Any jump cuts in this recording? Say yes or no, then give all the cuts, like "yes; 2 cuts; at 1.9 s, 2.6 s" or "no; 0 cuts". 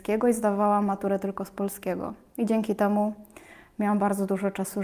no; 0 cuts